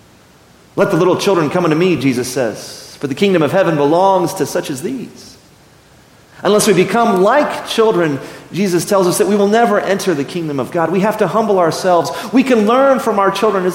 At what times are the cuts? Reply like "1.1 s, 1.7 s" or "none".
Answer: none

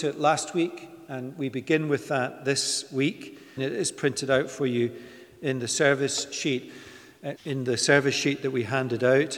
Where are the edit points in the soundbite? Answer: 3.6 s, 7.4 s

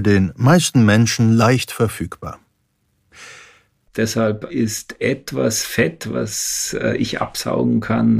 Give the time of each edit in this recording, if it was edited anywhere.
3.9 s

